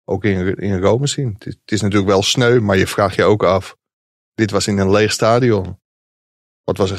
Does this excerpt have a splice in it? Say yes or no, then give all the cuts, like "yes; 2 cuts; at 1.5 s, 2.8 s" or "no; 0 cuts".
no; 0 cuts